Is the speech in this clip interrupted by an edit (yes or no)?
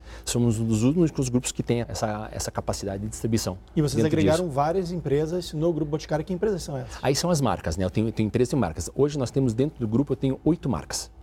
yes